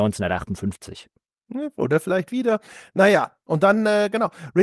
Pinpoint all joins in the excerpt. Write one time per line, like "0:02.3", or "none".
none